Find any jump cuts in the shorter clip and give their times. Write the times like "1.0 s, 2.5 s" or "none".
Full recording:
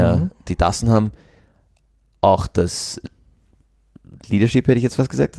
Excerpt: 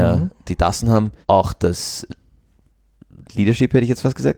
1.2 s